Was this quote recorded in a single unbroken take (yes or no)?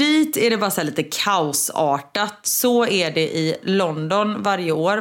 no